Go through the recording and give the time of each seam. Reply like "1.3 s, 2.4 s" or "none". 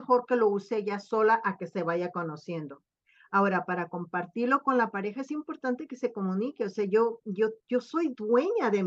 none